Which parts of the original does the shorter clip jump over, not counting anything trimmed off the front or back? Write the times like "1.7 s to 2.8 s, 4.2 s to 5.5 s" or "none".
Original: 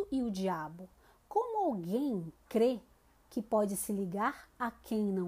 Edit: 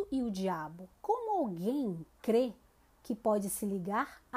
1.0 s to 1.2 s